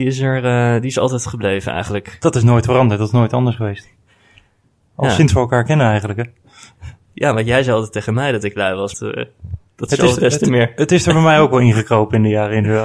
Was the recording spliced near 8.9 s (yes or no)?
yes